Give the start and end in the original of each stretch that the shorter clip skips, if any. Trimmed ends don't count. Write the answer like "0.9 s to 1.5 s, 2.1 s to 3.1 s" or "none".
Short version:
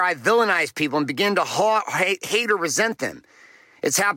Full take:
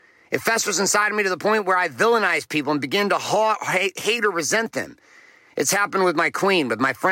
none